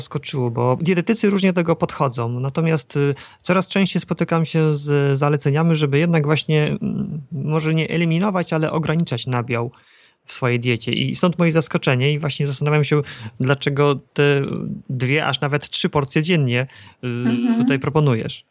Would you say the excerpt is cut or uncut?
uncut